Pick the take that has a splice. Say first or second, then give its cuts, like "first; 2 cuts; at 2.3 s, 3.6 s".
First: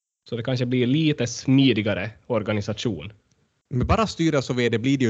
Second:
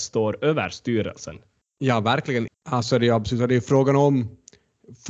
second; 1 cut; at 2.5 s